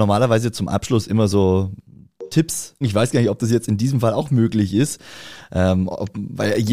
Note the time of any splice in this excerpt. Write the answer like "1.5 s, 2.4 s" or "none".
2.8 s

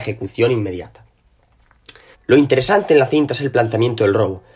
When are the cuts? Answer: 2.1 s

